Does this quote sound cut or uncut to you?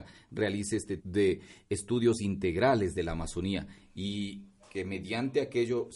cut